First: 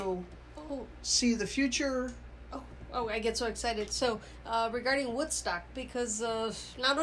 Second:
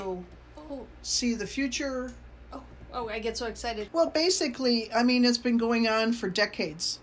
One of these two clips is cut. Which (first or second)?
second